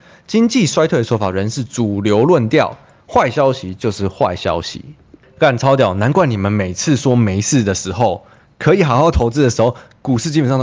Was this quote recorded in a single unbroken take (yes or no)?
yes